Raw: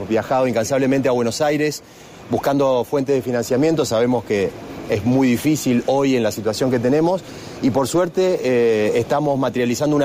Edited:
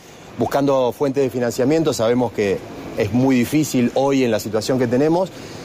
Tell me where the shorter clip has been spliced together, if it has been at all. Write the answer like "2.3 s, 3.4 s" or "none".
none